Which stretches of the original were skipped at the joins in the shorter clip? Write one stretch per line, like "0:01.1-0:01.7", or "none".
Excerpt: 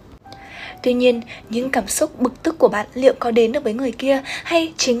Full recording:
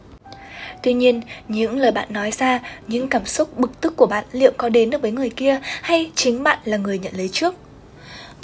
0:01.4-0:02.8